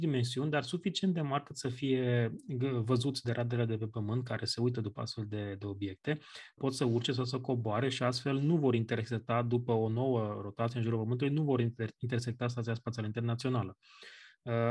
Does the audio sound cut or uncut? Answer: cut